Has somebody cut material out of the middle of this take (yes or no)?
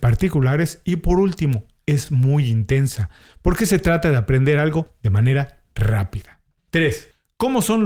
no